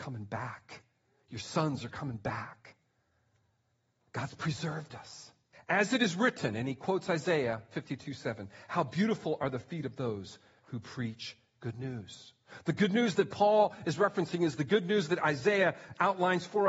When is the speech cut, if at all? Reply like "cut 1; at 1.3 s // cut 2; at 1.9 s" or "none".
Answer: cut 1; at 5.5 s